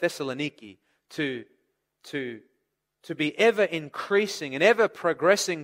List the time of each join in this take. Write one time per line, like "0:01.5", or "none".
none